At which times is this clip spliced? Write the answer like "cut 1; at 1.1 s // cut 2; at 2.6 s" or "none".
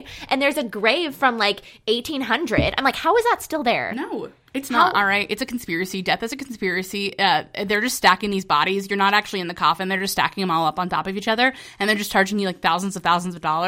none